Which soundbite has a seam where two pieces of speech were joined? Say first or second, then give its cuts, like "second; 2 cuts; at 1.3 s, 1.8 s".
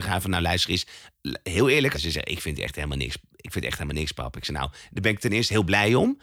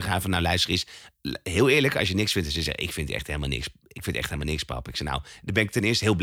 first; 1 cut; at 1.9 s